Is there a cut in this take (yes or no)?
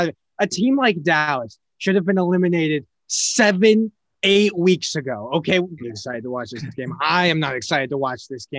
yes